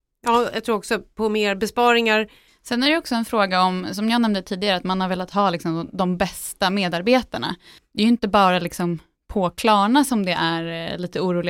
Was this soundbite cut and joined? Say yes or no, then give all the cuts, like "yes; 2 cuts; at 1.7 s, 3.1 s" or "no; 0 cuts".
yes; 1 cut; at 2.5 s